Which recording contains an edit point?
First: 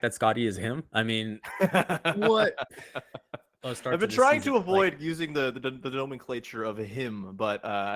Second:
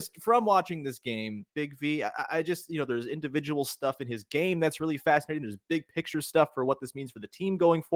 second; 1 cut; at 1.5 s

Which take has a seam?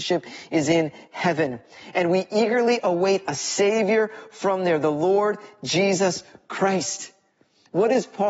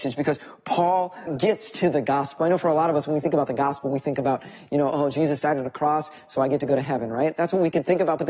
second; 2 cuts; at 1.3 s, 2.4 s

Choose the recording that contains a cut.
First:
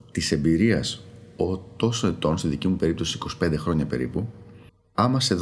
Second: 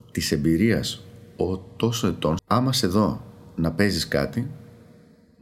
second; 1 cut; at 2.4 s

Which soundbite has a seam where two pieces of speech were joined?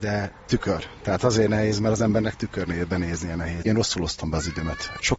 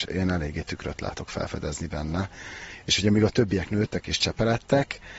first; 1 cut; at 3.6 s

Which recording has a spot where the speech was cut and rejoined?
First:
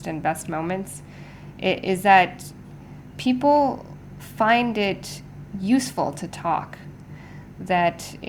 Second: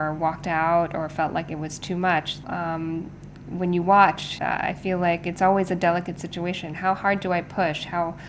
second; 2 cuts; at 2.4 s, 4.4 s

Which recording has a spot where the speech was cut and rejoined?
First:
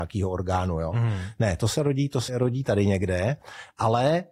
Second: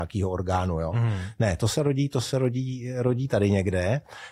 first; 1 cut; at 2.3 s

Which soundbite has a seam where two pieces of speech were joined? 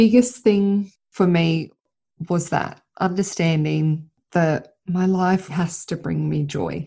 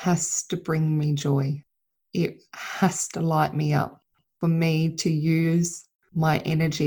first; 1 cut; at 5.5 s

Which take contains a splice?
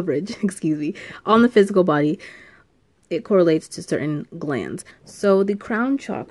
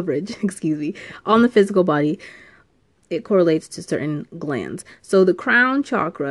first; 1 cut; at 4.9 s

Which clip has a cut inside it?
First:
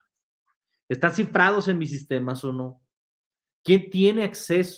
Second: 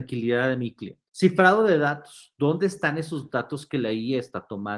second; 1 cut; at 1.1 s

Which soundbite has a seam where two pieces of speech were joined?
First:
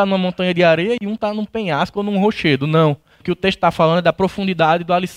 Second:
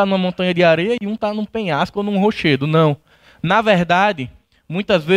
first; 1 cut; at 3.2 s

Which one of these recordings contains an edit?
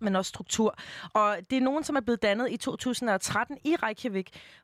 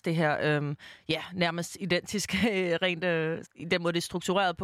second; 1 cut; at 3.4 s

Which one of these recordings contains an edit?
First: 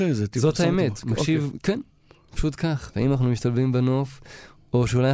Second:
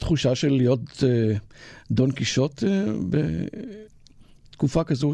first; 2 cuts; at 1.5 s, 2.9 s

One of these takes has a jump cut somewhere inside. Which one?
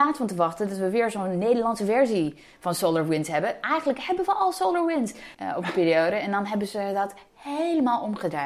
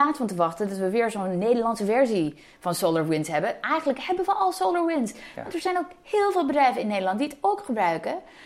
first; 1 cut; at 5.3 s

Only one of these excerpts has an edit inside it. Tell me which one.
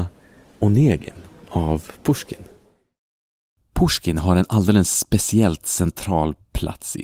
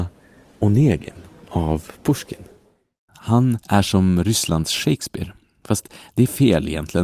second; 1 cut; at 3.1 s

